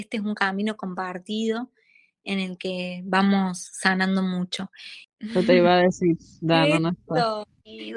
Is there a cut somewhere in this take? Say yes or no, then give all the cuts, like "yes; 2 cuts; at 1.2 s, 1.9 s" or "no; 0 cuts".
yes; 1 cut; at 5.0 s